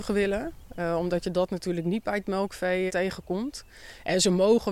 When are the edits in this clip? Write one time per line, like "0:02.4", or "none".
0:02.9